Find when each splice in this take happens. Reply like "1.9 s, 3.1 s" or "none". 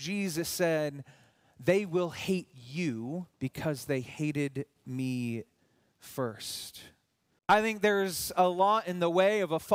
3.3 s, 7.4 s